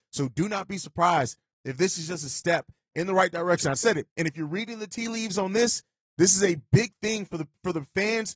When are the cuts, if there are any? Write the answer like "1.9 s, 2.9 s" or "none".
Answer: 4.1 s

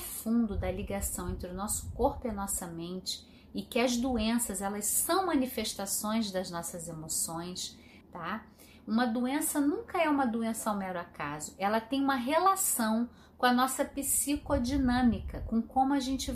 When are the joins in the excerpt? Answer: 8.0 s

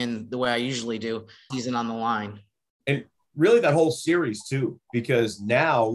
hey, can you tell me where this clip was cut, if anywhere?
1.5 s

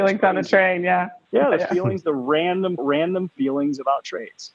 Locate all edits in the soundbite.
2.8 s

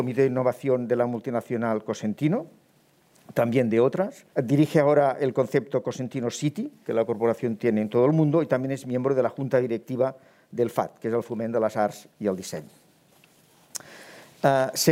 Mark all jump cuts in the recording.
4.3 s

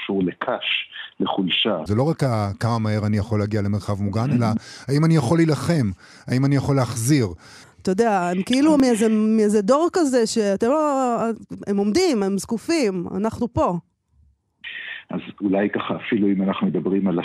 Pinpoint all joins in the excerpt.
1.9 s, 7.6 s

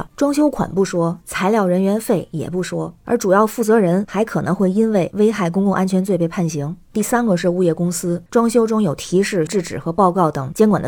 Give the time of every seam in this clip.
8.3 s, 9.5 s

